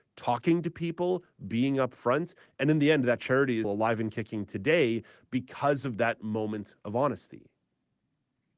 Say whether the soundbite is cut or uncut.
cut